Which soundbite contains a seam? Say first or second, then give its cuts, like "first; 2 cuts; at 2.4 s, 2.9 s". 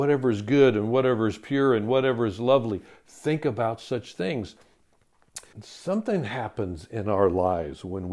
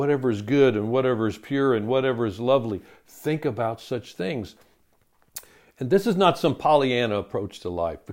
first; 1 cut; at 5.5 s